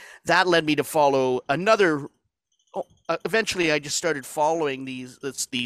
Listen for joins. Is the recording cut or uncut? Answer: uncut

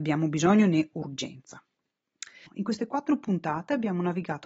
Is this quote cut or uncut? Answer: cut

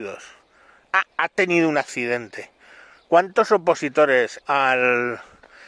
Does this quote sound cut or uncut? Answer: cut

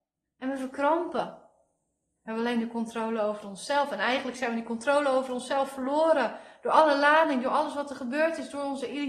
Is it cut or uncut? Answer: cut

